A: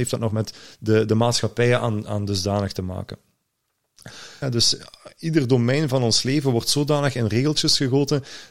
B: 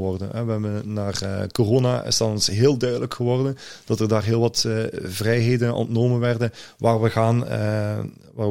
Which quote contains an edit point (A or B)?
A